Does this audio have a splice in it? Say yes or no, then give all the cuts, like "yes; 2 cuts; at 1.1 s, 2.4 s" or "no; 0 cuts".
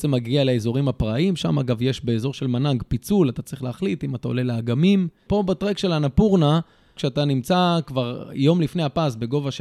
yes; 2 cuts; at 5.3 s, 7.0 s